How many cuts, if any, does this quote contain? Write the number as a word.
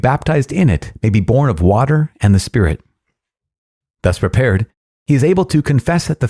one